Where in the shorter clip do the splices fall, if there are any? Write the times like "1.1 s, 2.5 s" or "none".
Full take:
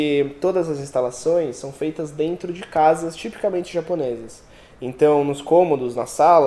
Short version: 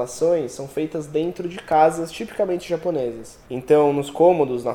3.4 s